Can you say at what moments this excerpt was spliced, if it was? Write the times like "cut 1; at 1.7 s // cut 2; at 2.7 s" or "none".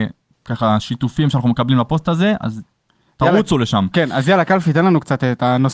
none